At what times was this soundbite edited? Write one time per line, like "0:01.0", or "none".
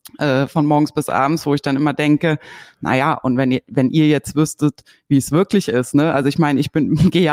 none